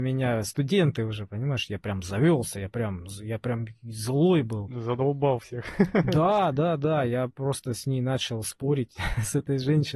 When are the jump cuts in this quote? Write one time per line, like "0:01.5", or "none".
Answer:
none